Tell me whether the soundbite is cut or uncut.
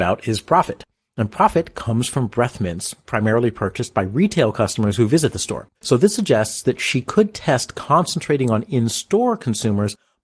cut